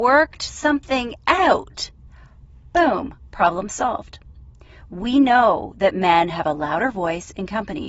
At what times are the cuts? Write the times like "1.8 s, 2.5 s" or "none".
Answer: none